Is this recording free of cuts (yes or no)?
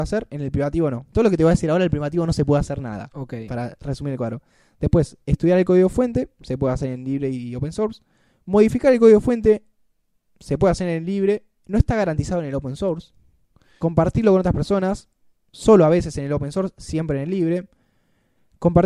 yes